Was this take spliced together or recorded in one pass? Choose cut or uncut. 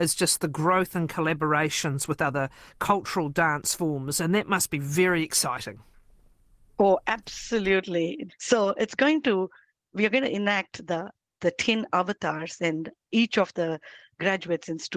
cut